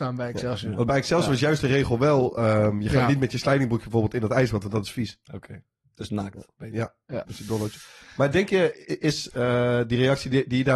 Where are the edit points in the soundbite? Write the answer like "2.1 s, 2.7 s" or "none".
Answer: 7.2 s